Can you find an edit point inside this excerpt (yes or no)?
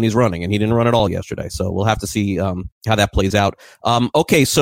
no